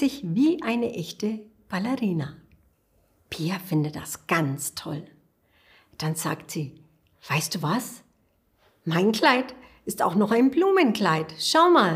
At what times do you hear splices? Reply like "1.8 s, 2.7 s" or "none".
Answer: none